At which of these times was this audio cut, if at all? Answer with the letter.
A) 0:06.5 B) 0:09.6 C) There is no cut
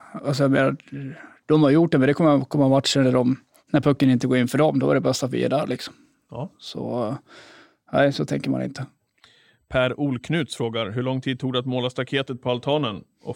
C